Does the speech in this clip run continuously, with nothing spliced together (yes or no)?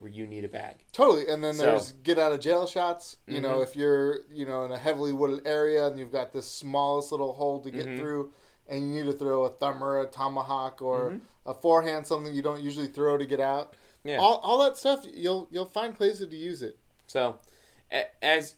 yes